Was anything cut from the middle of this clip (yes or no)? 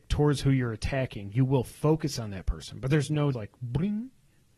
yes